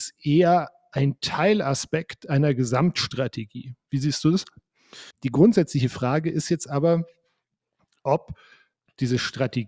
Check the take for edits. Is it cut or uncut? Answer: cut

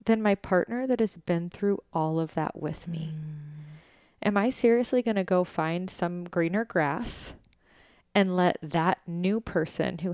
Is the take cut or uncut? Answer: uncut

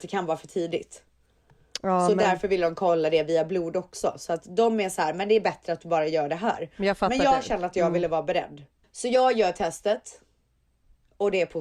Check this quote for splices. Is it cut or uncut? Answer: uncut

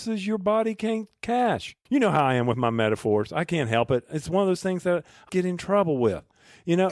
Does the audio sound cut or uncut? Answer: cut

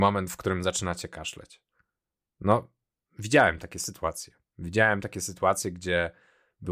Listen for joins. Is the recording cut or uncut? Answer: uncut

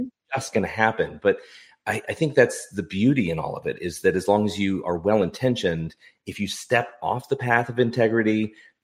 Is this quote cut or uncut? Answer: uncut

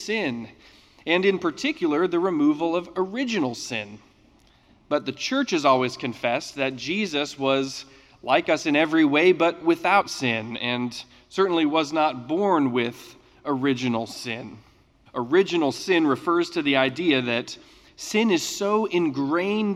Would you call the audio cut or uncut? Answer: cut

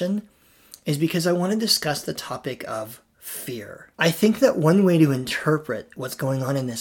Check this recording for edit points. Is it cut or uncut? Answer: cut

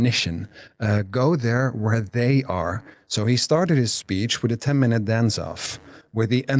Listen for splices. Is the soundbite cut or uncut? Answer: uncut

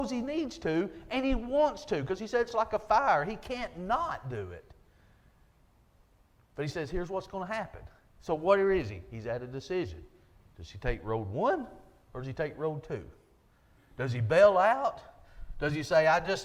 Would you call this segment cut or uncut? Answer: uncut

